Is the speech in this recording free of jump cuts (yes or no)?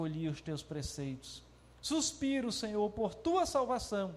yes